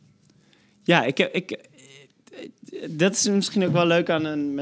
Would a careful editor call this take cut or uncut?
uncut